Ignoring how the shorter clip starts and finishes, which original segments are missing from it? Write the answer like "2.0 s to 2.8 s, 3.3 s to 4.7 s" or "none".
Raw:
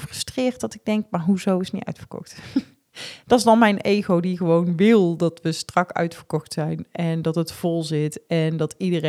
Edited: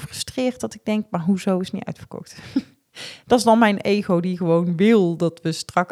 none